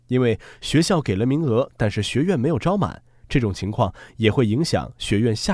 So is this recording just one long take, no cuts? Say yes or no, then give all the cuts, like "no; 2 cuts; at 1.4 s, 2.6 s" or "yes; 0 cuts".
yes; 0 cuts